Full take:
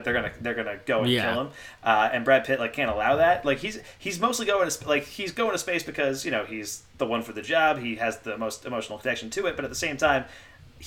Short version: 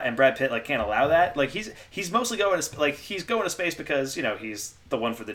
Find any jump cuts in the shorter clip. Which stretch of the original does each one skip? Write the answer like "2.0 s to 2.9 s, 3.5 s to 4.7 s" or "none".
none